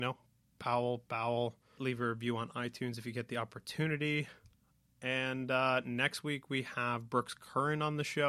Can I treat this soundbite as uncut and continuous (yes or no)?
no